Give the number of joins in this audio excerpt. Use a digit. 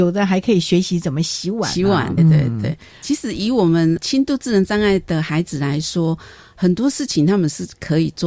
1